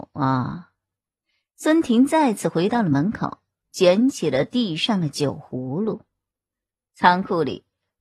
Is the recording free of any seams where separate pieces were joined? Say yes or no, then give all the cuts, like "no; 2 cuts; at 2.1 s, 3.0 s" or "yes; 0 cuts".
yes; 0 cuts